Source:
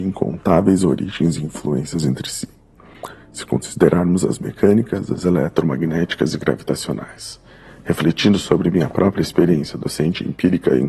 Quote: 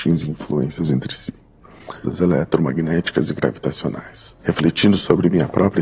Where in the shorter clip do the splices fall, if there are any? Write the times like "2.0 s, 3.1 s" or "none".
2.0 s, 4.4 s